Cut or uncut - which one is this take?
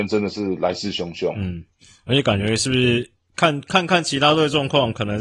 uncut